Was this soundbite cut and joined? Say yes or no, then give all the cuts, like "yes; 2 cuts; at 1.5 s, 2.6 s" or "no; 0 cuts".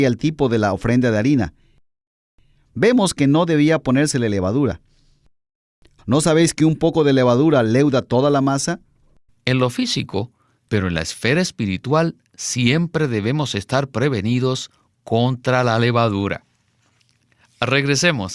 yes; 3 cuts; at 6.0 s, 9.3 s, 10.7 s